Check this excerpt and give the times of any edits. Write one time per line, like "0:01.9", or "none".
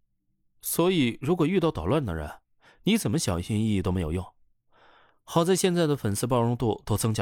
none